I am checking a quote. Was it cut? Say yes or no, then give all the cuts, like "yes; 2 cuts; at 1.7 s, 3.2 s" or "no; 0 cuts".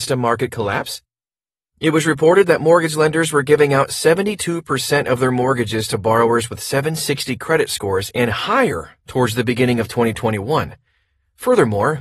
no; 0 cuts